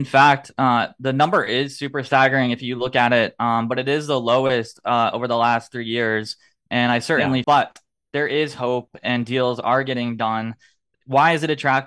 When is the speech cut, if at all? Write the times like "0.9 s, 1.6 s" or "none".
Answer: 7.4 s